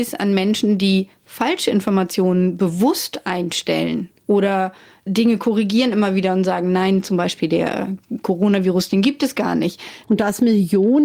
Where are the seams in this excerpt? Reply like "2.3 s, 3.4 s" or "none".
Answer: 10.0 s